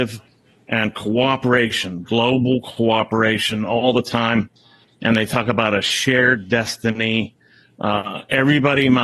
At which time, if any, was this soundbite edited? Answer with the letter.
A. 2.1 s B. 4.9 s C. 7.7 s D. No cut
D